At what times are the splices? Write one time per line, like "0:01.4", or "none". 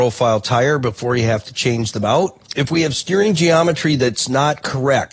0:02.5